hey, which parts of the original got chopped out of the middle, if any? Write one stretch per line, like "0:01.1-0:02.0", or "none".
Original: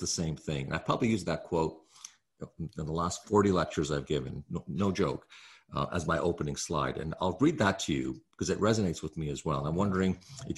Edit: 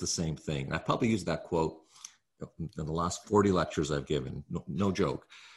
none